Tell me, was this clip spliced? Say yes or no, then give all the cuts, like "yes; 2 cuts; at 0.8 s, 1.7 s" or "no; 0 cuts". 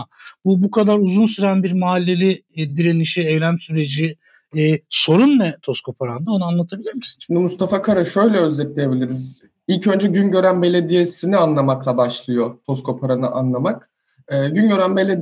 no; 0 cuts